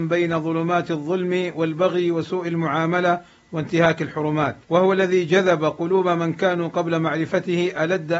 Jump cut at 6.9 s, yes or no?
no